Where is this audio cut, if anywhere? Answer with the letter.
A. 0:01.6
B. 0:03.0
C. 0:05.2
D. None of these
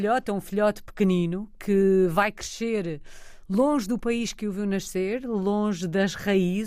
D